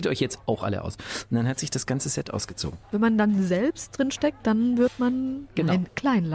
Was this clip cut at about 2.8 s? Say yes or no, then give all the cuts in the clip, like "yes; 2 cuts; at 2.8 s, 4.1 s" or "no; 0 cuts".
yes; 1 cut; at 2.8 s